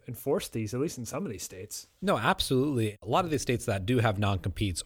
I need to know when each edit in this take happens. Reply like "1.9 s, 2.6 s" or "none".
3.0 s

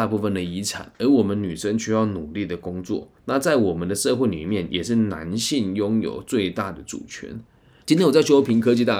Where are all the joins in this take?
7.8 s

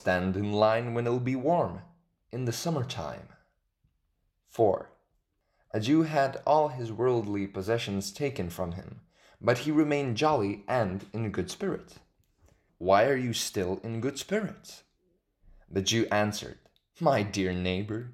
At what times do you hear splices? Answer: 12.7 s

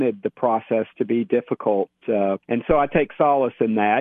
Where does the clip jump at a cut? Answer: 2.4 s

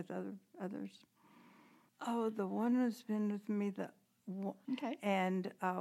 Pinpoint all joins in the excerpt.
1.9 s, 4.6 s

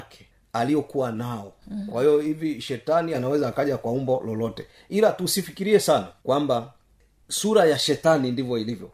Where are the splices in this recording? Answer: 1.9 s, 6.2 s

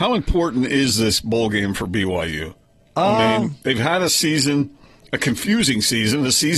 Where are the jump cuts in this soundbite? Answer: none

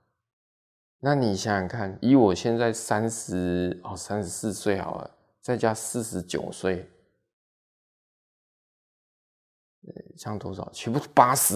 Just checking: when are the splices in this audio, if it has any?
2.0 s

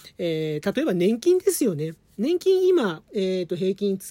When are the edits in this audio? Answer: 3.0 s

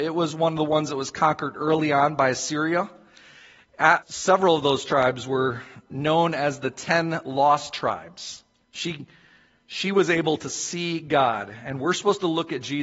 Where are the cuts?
4.0 s, 8.6 s

